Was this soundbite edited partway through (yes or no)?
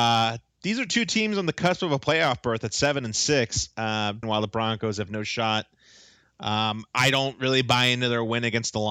yes